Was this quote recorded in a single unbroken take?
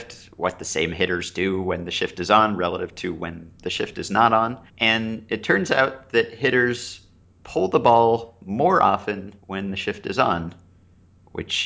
no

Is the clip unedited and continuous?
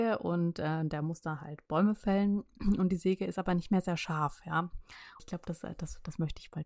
no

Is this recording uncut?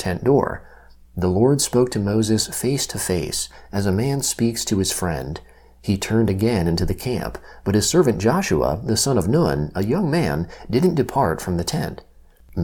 yes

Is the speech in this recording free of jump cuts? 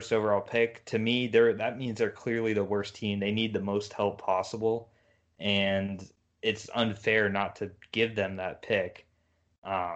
yes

